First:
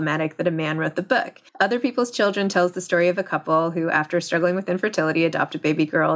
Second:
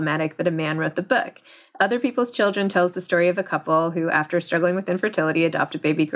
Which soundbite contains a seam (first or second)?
first